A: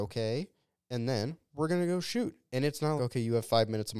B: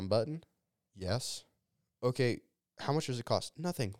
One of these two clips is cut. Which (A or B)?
A